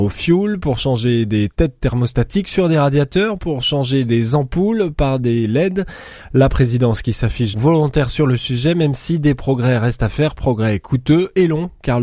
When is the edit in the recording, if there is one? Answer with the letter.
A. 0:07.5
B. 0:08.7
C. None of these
A